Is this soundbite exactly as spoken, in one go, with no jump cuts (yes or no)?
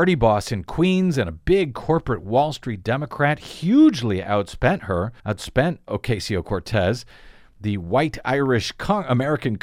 no